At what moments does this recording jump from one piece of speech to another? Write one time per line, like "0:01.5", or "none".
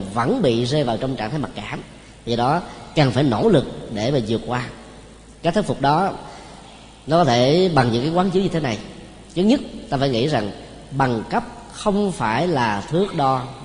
none